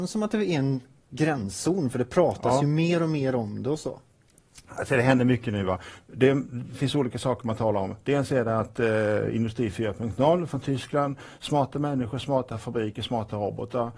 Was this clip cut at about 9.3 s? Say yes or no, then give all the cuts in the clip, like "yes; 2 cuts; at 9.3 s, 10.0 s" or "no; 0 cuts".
no; 0 cuts